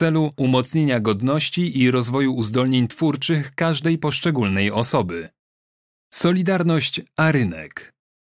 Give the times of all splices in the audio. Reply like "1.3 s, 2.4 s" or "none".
none